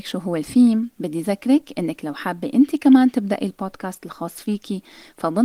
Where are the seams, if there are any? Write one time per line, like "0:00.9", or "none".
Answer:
none